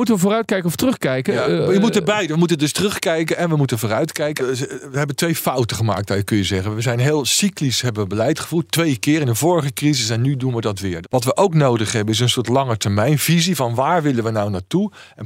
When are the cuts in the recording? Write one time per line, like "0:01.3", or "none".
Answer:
0:04.4
0:11.0